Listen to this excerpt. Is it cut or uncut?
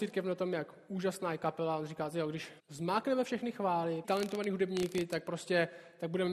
cut